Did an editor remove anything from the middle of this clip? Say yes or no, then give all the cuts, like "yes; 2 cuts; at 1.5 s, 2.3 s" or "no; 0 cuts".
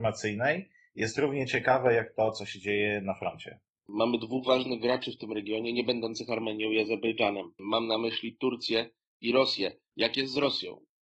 yes; 2 cuts; at 3.9 s, 9.9 s